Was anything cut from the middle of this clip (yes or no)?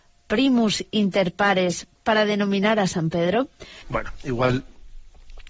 yes